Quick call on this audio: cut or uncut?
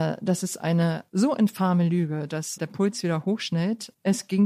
cut